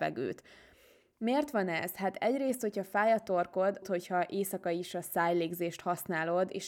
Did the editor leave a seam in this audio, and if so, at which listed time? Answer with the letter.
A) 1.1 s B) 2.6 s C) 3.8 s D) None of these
C